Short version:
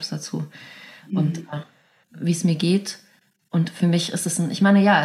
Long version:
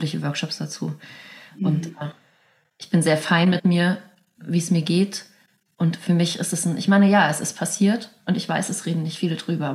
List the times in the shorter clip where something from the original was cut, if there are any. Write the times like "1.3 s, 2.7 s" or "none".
2.0 s

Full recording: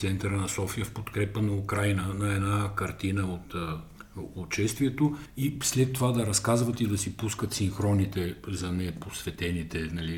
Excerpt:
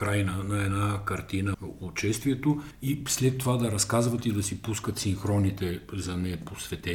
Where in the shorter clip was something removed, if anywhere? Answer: 1.5 s

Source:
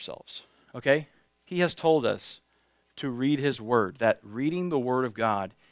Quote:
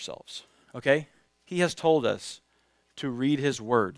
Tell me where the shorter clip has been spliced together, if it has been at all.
none

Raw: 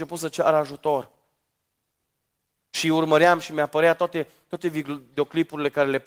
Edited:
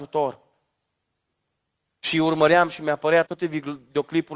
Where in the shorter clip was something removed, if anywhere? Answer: 3.3 s

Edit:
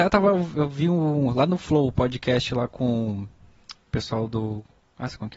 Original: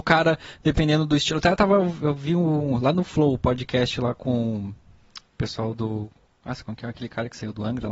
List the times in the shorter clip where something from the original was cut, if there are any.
none

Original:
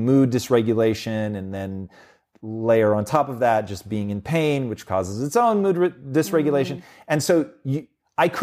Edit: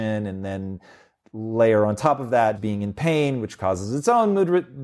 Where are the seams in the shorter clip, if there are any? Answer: 2.5 s

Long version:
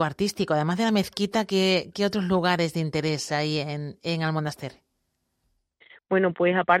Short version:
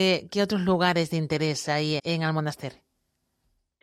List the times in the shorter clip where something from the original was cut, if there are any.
2.0 s

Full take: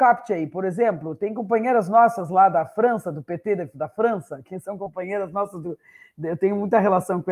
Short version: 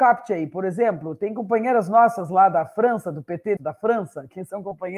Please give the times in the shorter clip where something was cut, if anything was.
3.6 s

